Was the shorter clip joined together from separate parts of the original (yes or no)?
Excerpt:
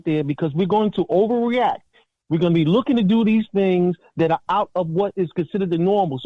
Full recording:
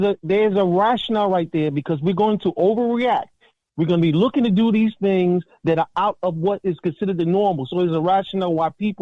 no